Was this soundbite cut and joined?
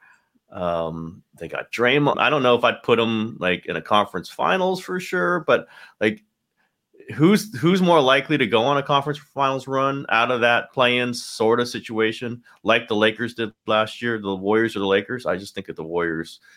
yes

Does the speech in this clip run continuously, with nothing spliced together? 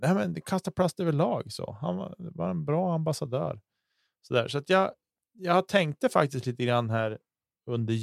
yes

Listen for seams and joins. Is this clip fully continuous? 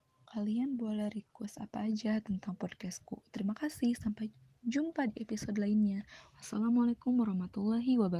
yes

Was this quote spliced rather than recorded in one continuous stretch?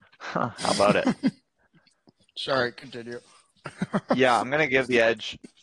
no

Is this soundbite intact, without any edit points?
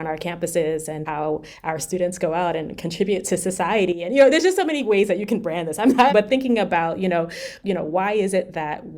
no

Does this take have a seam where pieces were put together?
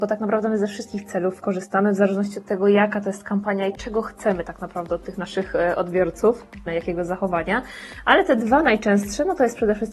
yes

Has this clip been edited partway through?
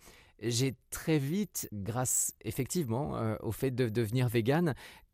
no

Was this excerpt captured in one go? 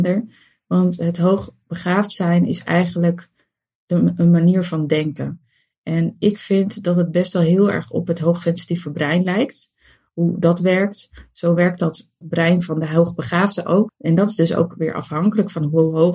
no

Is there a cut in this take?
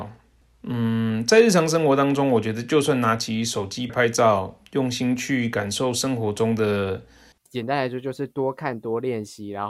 yes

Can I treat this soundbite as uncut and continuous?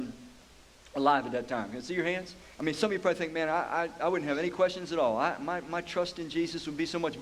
no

